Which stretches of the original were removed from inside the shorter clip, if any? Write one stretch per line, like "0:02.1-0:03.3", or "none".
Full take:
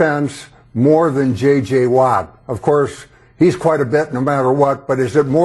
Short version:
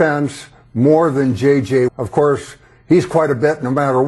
0:01.9-0:02.4